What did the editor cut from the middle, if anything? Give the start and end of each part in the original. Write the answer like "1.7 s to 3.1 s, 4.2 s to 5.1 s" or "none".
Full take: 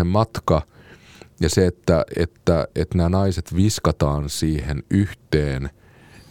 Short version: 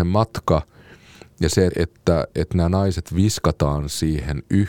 1.7 s to 2.1 s